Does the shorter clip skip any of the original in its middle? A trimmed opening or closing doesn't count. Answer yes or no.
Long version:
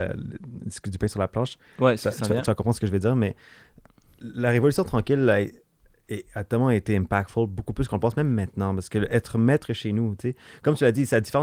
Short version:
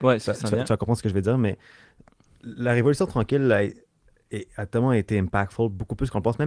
no